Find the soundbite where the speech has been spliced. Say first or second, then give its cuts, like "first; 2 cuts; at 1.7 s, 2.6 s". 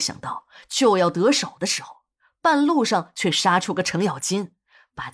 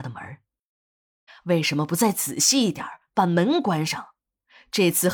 second; 1 cut; at 1.3 s